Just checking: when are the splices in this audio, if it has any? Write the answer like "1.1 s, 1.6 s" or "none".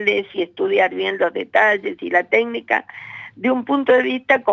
none